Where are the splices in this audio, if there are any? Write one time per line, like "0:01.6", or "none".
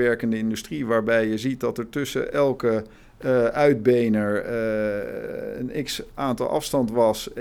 none